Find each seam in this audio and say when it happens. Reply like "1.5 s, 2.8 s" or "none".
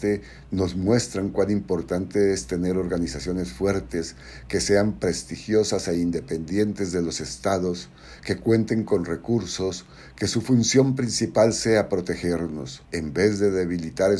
12.8 s